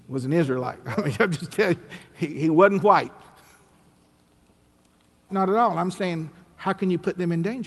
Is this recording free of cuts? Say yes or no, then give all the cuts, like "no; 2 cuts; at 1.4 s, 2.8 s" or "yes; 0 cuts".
no; 1 cut; at 5.3 s